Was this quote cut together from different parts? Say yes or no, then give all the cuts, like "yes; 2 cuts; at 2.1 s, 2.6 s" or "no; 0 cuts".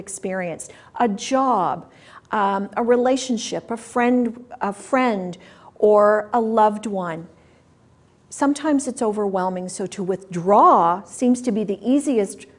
no; 0 cuts